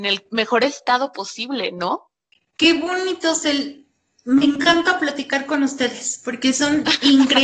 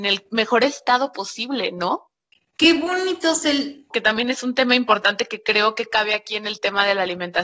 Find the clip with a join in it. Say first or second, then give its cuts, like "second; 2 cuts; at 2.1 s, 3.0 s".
second; 1 cut; at 3.9 s